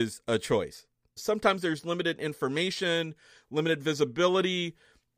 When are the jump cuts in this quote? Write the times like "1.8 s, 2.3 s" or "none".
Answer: 1.2 s